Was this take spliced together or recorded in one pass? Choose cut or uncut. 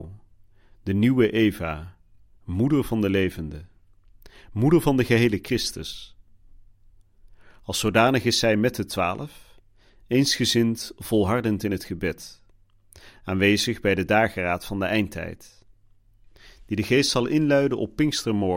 uncut